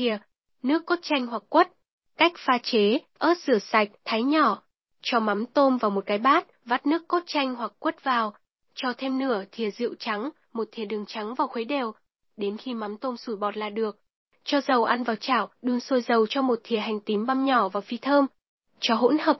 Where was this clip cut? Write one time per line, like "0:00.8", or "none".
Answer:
none